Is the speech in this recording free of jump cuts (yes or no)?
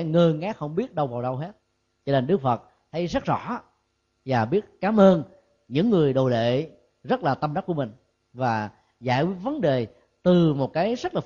yes